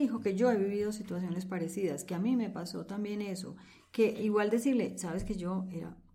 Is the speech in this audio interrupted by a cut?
no; 0 cuts

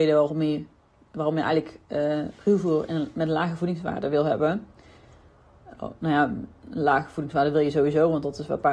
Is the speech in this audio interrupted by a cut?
no; 0 cuts

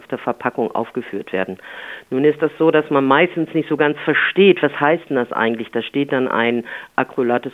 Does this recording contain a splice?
no; 0 cuts

